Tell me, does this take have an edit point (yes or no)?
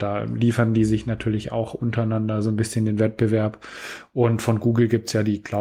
no